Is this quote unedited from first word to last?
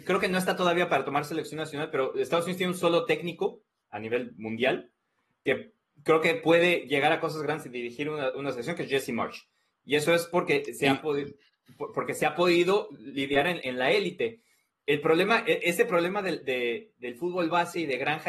yes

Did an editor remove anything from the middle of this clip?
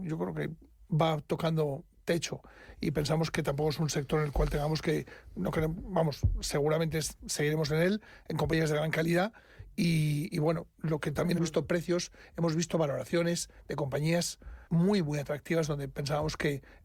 yes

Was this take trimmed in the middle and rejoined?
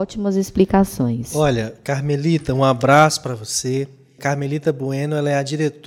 yes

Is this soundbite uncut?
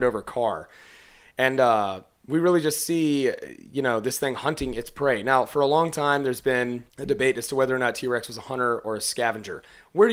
yes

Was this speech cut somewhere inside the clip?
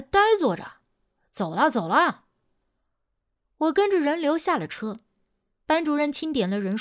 no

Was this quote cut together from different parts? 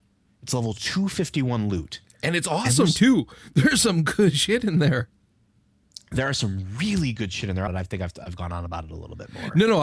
yes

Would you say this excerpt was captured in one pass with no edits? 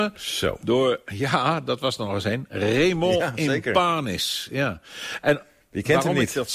yes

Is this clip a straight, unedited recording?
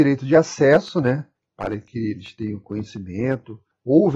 no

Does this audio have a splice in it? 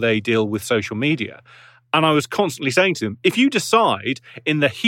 no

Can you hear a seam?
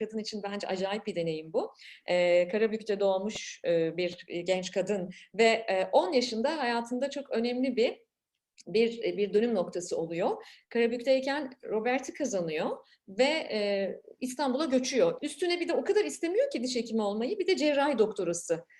yes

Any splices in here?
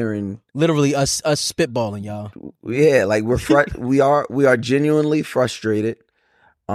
no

